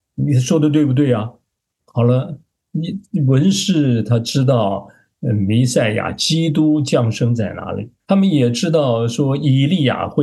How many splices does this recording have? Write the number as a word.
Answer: two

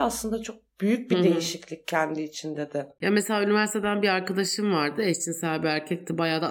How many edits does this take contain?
zero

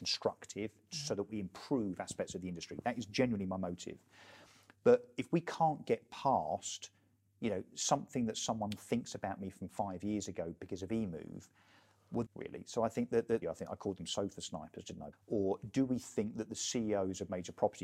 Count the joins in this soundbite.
three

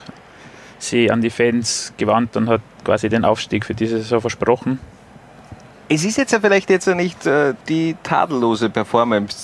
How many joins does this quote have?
two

